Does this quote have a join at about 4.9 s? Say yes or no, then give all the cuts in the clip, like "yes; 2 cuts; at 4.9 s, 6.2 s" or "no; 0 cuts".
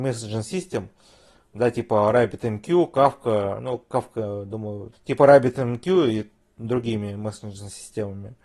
yes; 1 cut; at 4.9 s